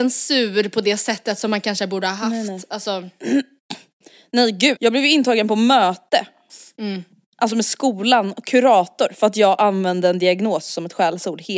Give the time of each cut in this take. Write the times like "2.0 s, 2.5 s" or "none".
4.8 s